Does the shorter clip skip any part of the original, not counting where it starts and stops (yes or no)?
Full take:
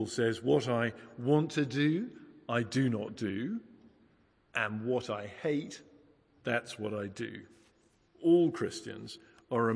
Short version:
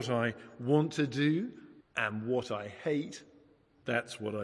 yes